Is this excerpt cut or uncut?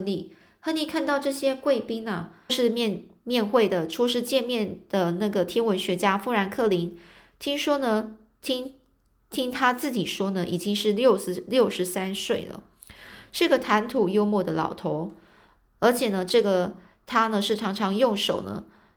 cut